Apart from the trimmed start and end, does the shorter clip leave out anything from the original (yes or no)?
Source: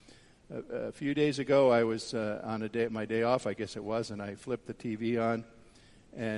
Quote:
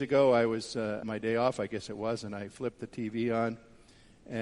yes